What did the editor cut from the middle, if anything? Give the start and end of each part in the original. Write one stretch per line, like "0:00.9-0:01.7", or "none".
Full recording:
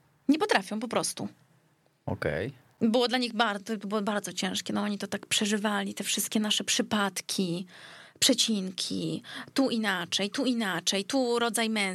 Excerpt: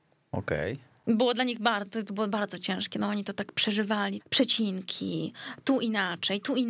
0:05.9-0:08.1